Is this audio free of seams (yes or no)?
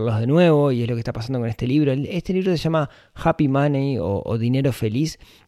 yes